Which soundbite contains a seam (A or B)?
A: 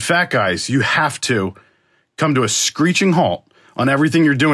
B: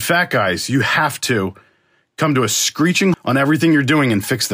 B